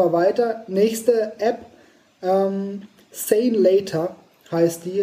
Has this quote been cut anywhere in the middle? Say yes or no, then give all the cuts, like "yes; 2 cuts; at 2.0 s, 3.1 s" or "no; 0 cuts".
yes; 1 cut; at 3.0 s